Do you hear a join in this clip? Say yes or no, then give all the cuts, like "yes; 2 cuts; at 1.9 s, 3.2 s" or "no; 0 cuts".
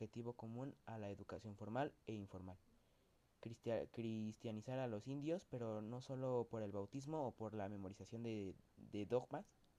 no; 0 cuts